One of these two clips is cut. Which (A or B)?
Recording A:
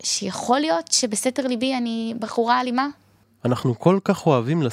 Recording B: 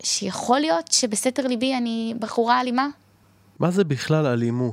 A